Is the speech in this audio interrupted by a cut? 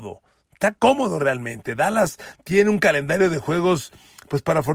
no; 0 cuts

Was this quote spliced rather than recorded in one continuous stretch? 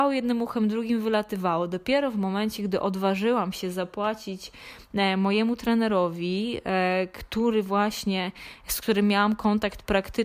no; 0 cuts

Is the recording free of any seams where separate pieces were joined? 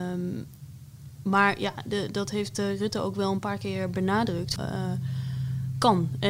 no; 1 cut; at 4.6 s

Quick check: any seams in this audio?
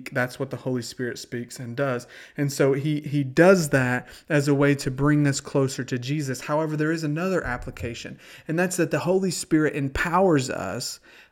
no; 0 cuts

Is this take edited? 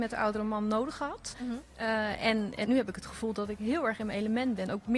yes; 2 cuts; at 1.3 s, 2.6 s

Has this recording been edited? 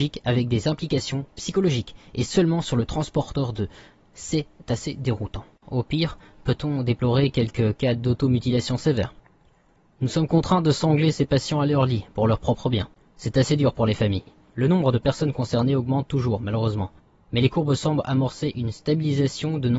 yes; 1 cut; at 5.6 s

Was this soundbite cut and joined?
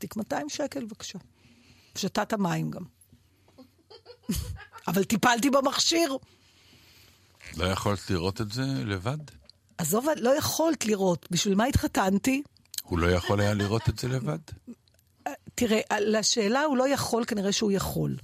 no; 0 cuts

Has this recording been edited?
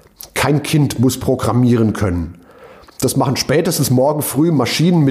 no; 0 cuts

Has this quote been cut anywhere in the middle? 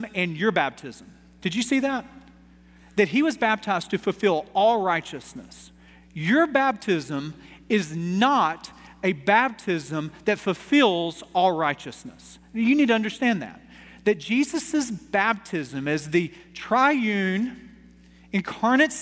yes; 1 cut; at 1.4 s

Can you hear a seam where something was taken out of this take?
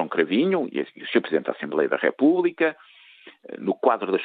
no; 0 cuts

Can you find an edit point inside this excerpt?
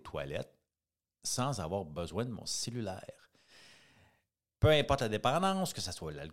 yes; 1 cut; at 4.6 s

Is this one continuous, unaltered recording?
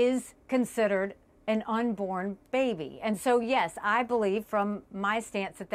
yes; 0 cuts

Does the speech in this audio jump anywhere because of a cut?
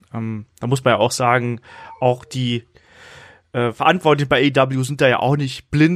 no; 0 cuts

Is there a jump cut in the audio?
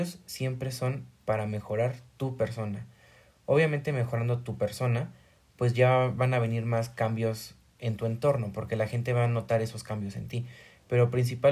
no; 0 cuts

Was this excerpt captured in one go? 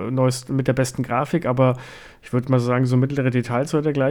yes; 0 cuts

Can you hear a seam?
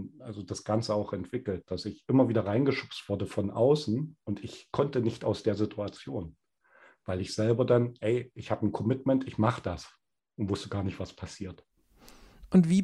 no; 0 cuts

